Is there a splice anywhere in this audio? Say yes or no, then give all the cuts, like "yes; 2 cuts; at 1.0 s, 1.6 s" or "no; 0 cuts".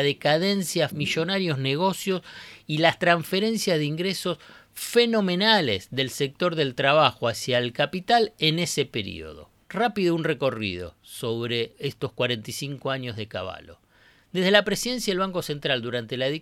yes; 1 cut; at 0.9 s